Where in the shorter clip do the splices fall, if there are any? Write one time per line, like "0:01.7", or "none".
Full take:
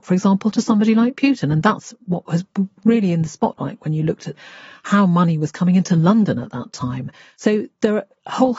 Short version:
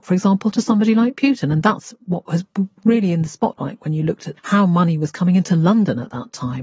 0:04.4